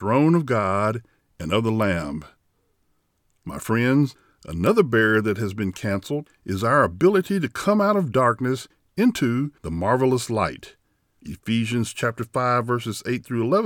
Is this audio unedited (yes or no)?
yes